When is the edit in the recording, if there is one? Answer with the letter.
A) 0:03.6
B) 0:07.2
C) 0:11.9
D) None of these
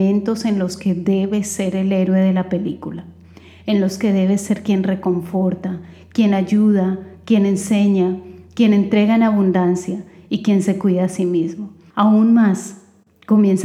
C